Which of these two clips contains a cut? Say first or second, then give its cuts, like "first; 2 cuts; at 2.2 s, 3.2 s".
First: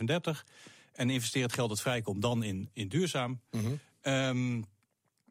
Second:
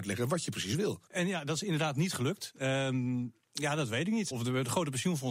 second; 3 cuts; at 1.1 s, 2.6 s, 4.3 s